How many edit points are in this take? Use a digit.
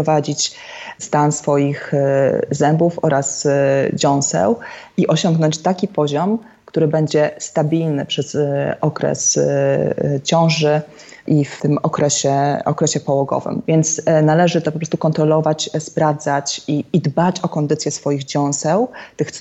1